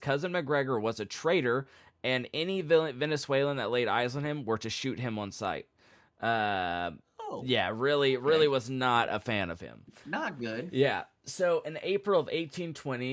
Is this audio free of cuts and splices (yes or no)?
yes